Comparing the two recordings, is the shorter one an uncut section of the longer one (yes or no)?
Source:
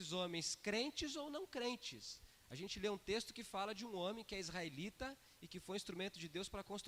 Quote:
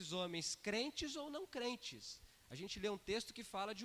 yes